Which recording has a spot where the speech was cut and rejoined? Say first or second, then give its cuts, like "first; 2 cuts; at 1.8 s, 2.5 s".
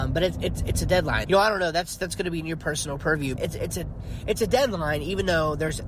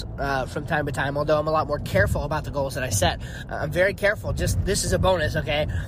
first; 2 cuts; at 1.2 s, 3.4 s